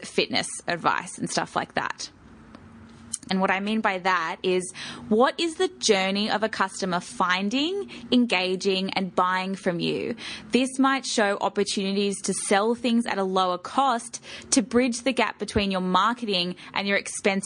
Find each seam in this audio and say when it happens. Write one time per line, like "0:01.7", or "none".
0:03.3